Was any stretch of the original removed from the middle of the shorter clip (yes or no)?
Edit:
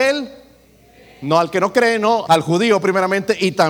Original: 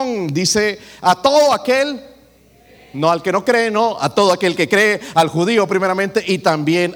yes